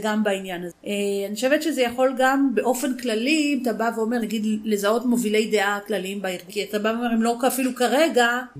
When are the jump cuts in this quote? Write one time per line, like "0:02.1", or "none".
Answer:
0:04.2
0:06.5